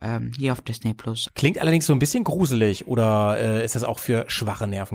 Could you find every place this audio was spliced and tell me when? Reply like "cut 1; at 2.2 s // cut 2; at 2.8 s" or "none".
cut 1; at 1.3 s